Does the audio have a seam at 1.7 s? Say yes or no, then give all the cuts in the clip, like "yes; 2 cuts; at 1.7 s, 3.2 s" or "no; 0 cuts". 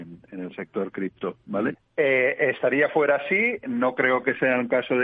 yes; 1 cut; at 1.7 s